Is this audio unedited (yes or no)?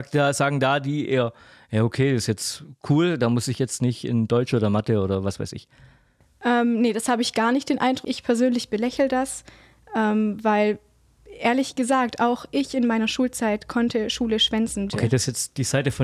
no